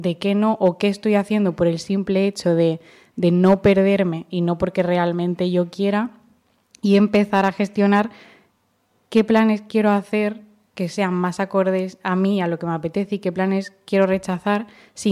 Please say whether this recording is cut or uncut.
uncut